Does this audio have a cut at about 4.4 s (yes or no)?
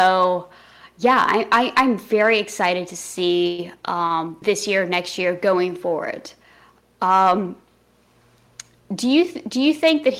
yes